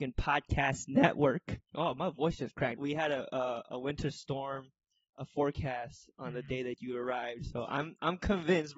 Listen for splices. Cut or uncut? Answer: cut